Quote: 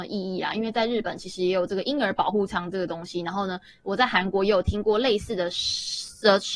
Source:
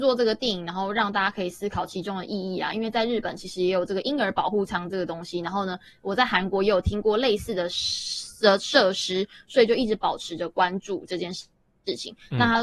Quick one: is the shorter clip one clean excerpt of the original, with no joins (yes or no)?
yes